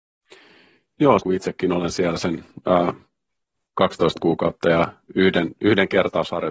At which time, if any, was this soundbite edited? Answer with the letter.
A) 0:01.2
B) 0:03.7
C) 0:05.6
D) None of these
A